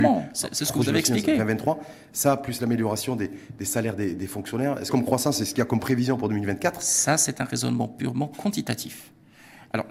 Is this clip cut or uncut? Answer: cut